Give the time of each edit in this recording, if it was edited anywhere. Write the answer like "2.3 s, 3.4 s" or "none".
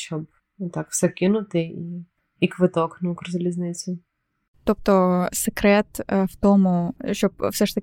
none

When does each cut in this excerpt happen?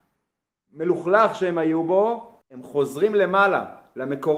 2.4 s

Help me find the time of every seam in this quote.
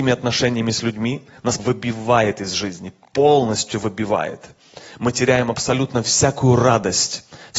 1.6 s

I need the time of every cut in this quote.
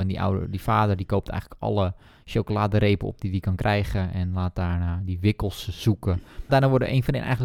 6.5 s

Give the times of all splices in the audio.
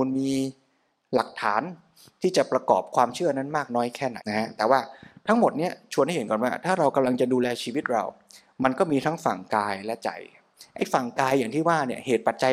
4.2 s

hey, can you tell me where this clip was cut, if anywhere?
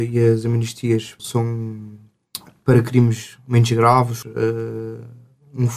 1.2 s, 4.2 s

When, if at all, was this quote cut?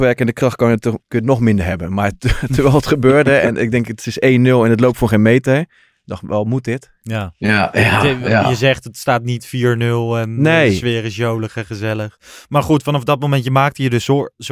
1.0 s

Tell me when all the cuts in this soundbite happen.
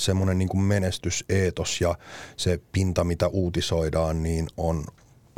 none

